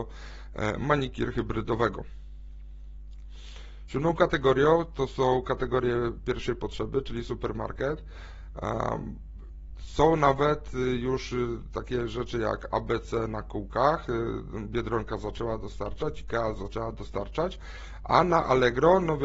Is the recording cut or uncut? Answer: uncut